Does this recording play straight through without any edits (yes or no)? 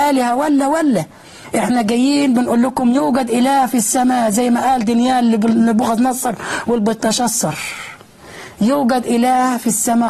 yes